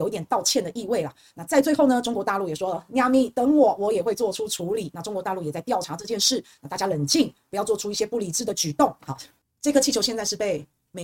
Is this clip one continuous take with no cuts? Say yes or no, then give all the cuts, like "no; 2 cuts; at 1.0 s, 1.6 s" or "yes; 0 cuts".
no; 1 cut; at 9.0 s